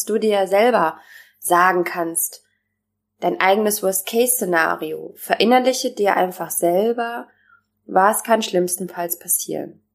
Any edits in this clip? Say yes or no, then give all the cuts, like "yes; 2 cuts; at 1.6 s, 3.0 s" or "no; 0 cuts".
no; 0 cuts